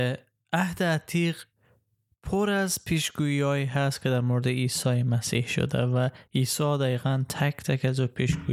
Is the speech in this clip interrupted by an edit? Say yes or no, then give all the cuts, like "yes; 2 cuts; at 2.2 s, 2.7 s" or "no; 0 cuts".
no; 0 cuts